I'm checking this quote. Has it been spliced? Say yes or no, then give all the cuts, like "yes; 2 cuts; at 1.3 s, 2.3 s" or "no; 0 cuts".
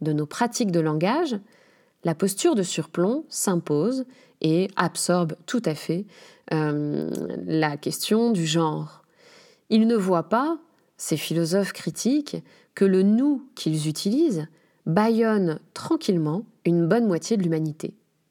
no; 0 cuts